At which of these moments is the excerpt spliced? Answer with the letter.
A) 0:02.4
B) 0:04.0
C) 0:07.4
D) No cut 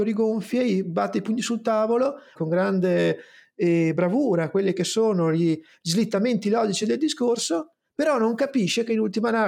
A